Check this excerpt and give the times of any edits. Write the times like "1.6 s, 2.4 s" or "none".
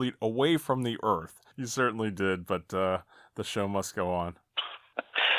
1.5 s

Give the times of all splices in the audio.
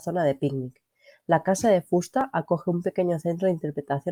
none

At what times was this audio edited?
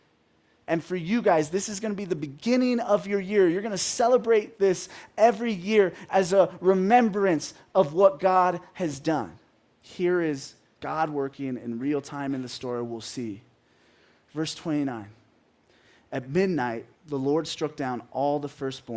9.7 s, 16.9 s

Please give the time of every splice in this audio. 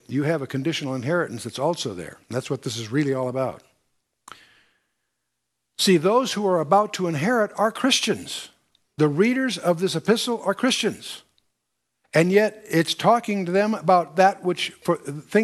none

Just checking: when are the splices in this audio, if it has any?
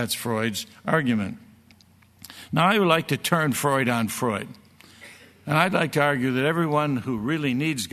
none

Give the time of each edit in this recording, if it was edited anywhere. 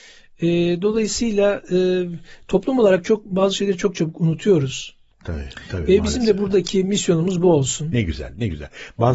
5.1 s

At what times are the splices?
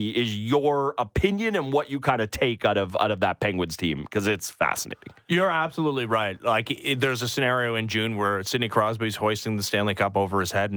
none

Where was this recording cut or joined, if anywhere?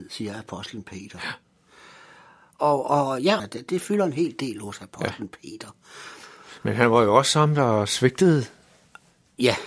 3.4 s

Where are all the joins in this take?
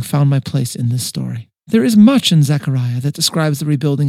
1.6 s

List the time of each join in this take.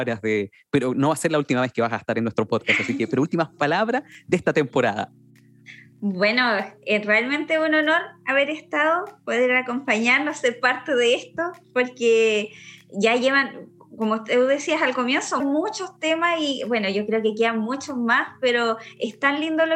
15.4 s

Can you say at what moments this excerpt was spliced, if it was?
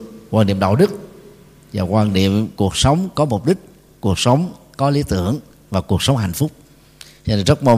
none

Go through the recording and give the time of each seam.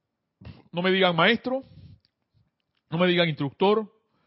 none

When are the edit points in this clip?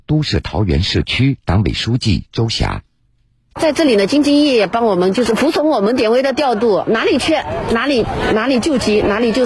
5.3 s

